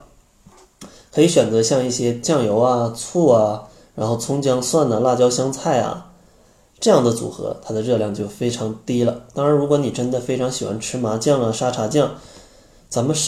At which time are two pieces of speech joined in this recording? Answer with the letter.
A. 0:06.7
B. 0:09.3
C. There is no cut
C